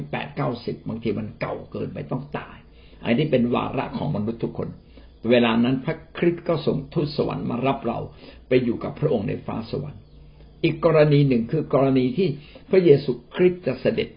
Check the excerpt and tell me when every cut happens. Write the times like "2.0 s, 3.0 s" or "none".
none